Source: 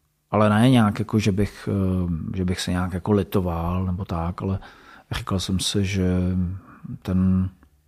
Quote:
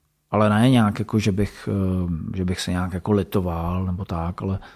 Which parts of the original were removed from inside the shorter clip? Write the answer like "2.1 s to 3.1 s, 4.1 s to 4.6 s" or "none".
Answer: none